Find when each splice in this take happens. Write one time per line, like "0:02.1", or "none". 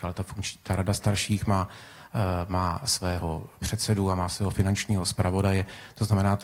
none